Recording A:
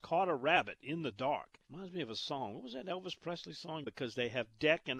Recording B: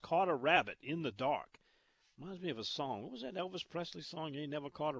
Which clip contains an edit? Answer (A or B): A